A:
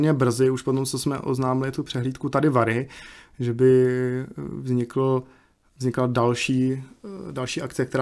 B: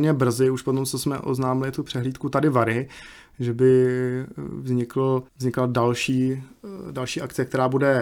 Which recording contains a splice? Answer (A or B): B